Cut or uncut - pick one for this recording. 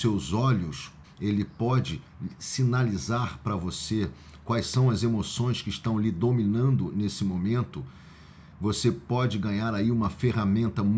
cut